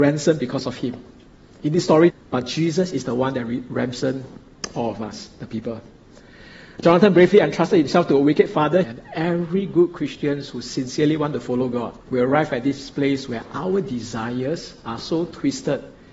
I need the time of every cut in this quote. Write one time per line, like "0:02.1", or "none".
0:02.1
0:08.8
0:12.0